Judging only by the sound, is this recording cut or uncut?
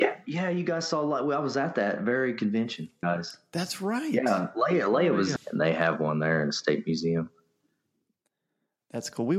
cut